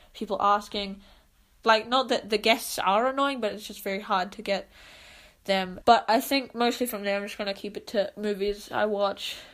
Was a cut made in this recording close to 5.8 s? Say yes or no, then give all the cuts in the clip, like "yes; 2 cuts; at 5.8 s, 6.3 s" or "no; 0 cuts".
yes; 2 cuts; at 1.6 s, 5.8 s